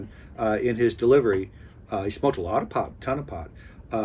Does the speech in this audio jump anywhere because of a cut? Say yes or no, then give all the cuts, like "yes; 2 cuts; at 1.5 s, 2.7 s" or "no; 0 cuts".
yes; 1 cut; at 2.9 s